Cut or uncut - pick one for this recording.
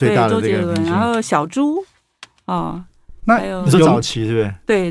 uncut